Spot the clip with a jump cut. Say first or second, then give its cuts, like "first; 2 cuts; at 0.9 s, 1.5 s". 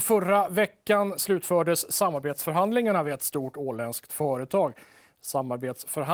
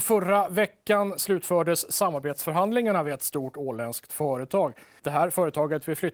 second; 1 cut; at 5.0 s